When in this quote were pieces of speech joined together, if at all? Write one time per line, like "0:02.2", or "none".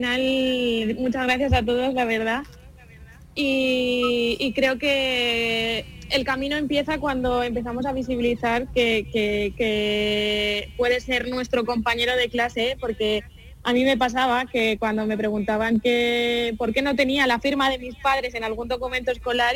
0:09.5